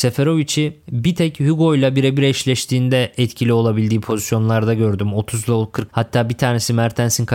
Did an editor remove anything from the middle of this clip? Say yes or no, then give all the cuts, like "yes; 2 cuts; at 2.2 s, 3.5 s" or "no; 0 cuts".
yes; 1 cut; at 5.9 s